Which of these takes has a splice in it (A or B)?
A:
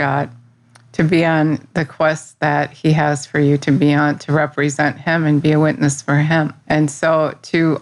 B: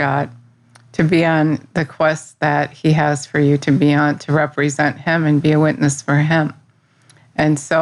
A